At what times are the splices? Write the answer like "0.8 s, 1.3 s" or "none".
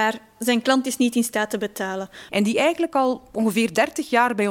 2.3 s